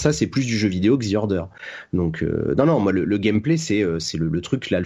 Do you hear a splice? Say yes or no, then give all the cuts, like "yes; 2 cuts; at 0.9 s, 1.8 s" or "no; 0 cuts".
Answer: no; 0 cuts